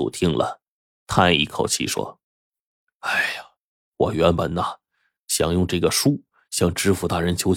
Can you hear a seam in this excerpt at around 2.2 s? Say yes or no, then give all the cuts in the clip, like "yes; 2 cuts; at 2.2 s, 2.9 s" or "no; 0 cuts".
yes; 1 cut; at 2.2 s